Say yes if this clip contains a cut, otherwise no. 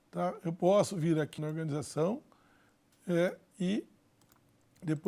yes